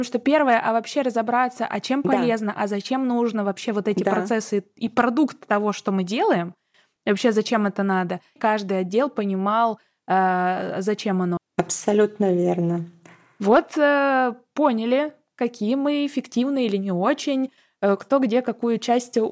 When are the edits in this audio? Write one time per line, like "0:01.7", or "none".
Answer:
0:08.4
0:11.4